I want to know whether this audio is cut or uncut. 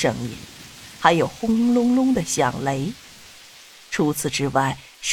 uncut